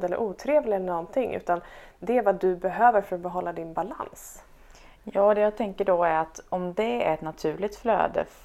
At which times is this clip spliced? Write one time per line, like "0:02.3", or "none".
none